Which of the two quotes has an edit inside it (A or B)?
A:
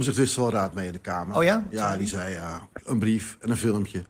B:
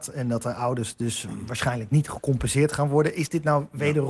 A